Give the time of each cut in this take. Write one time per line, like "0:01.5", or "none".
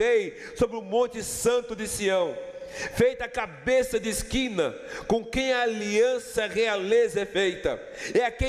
none